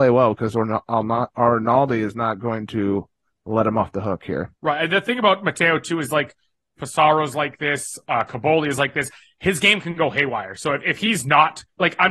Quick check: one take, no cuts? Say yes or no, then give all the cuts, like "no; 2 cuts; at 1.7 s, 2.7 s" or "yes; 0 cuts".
no; 2 cuts; at 4.6 s, 6.8 s